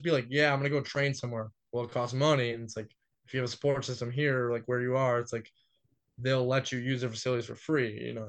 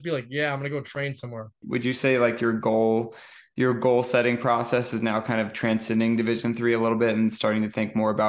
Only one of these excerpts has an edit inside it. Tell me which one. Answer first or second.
second